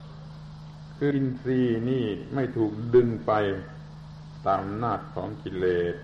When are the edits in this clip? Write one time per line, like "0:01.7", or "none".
0:01.1